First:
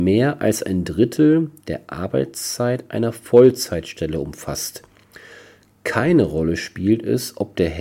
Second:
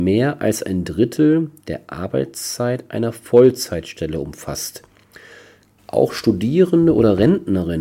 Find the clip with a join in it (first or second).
second